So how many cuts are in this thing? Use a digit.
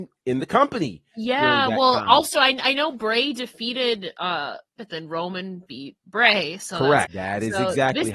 2